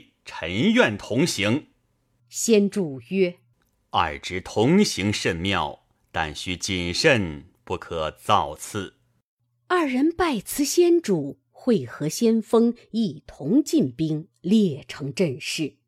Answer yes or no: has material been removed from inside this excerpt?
no